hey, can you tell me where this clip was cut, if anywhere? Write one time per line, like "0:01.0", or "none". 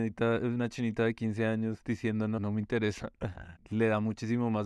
0:02.4
0:03.6